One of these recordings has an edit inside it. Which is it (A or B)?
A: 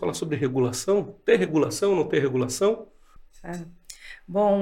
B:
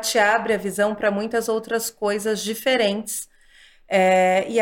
A